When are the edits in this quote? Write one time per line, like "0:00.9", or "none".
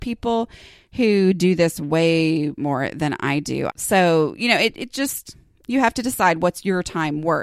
0:03.7

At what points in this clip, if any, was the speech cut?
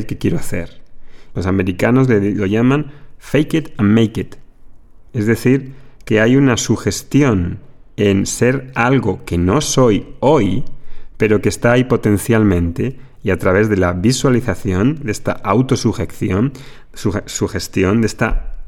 0:01.3

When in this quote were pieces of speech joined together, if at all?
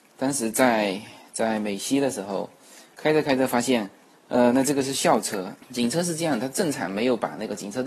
0:04.1
0:05.6

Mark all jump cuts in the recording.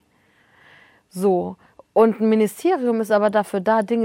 none

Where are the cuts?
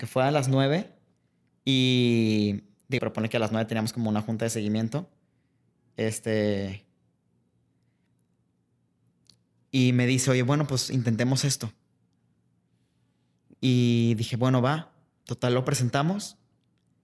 0:03.0

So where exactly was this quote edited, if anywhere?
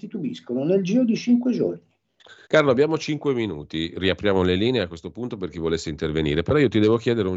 0:02.4

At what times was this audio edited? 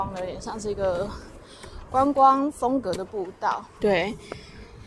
0:03.8

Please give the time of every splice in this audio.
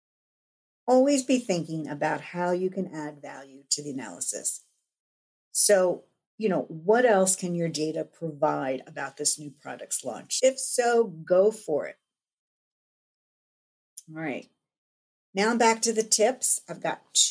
0:10.4

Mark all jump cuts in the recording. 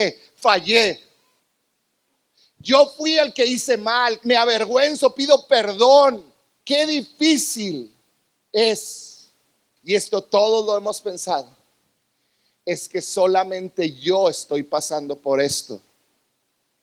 0:04.2
0:09.8

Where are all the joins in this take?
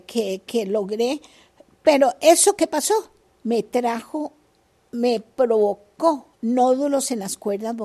0:06.3

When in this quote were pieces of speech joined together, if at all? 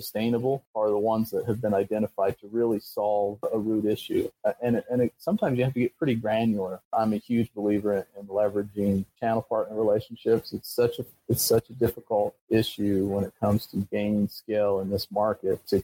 0:06.8

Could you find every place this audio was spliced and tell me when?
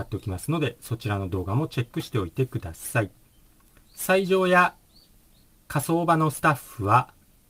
0:03.9

